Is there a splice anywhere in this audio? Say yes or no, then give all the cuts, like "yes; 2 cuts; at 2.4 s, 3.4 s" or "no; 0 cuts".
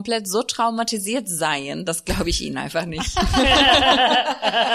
no; 0 cuts